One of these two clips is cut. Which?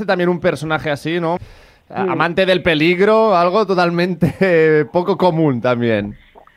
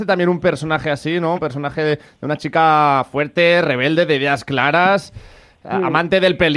first; 1 cut; at 1.4 s

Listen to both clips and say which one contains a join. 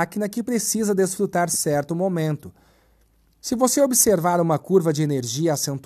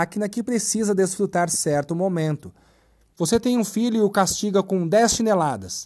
second; 1 cut; at 3.1 s

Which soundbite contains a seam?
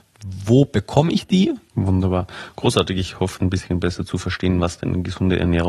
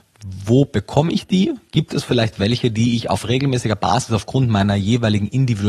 first; 2 cuts; at 1.7 s, 3.4 s

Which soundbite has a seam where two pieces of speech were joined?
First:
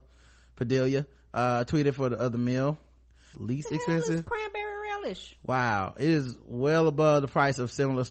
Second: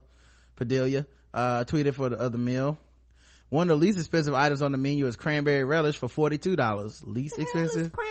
first; 1 cut; at 3.3 s

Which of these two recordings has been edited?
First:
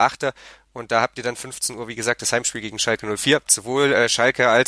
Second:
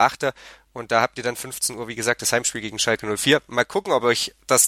first; 1 cut; at 3.4 s

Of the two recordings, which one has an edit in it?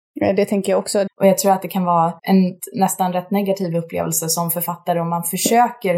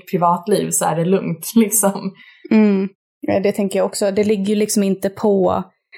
first; 2 cuts; at 1.1 s, 2.2 s

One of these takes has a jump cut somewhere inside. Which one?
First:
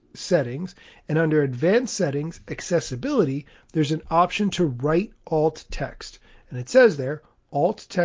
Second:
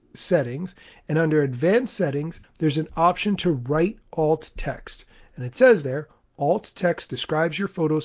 second; 1 cut; at 2.4 s

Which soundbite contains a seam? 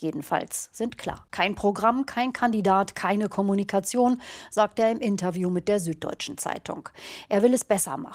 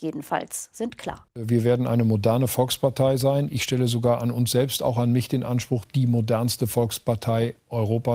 first; 1 cut; at 1.3 s

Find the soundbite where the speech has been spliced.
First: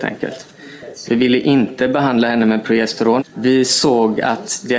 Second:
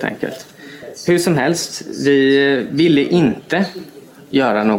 first; 2 cuts; at 1.1 s, 3.2 s

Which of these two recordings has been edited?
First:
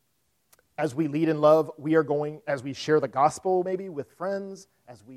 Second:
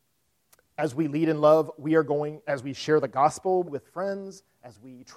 second; 1 cut; at 3.6 s

